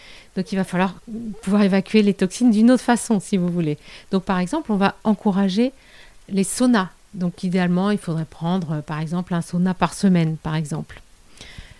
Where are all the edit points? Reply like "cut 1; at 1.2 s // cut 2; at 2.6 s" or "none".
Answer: cut 1; at 7.1 s